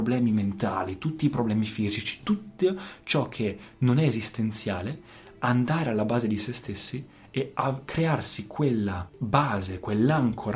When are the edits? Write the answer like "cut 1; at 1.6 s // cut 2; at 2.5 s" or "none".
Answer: none